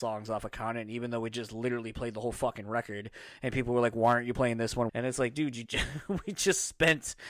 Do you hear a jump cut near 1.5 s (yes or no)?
no